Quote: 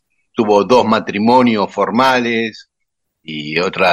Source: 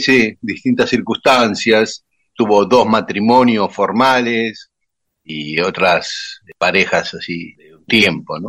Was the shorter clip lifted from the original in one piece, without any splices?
yes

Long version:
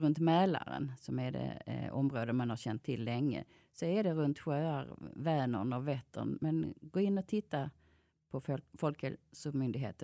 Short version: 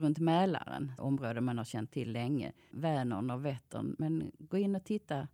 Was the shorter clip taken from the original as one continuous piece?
no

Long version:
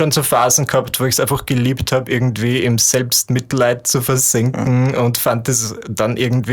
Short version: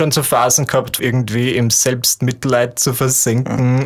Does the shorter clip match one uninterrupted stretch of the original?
no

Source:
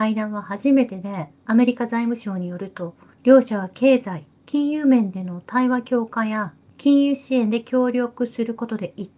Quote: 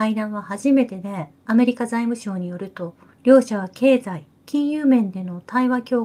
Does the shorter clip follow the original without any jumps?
yes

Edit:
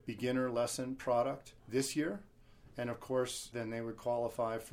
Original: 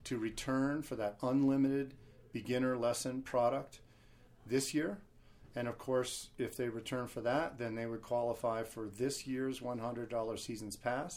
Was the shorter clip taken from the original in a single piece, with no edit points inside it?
no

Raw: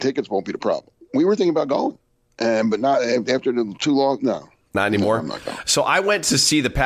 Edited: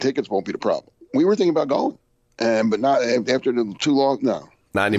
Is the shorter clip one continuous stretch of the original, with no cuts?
yes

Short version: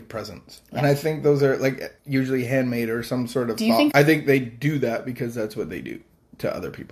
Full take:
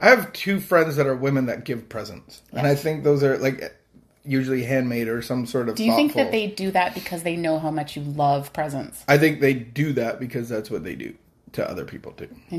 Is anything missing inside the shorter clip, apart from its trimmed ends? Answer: yes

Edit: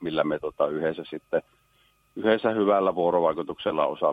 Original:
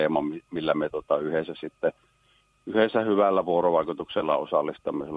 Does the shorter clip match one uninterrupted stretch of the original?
yes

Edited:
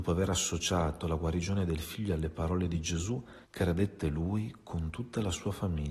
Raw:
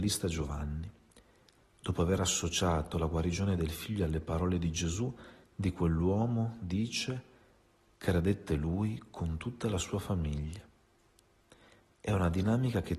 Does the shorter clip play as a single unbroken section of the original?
no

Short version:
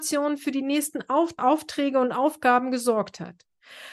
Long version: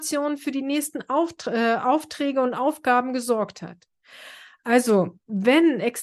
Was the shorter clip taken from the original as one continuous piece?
no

